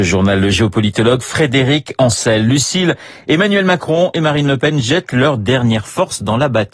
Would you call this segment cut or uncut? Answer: uncut